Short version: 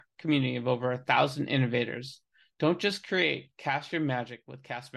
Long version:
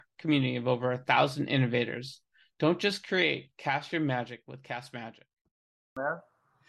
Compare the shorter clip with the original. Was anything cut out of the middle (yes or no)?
no